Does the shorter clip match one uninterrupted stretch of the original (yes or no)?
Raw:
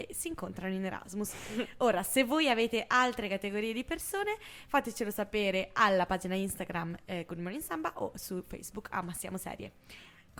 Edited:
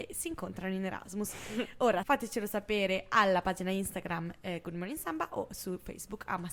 no